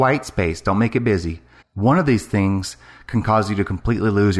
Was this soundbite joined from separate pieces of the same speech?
yes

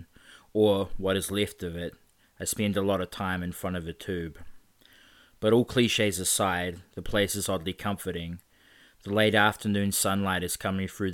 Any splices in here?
yes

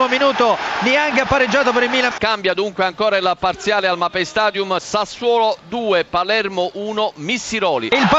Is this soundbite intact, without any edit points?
no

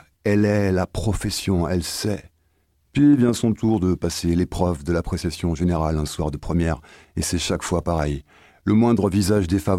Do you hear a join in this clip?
no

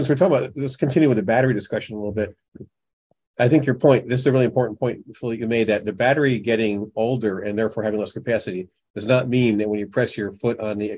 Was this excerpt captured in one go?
yes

